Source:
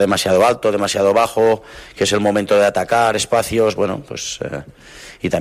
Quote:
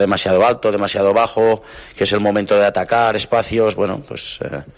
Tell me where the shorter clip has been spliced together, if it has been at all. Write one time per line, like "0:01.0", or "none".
none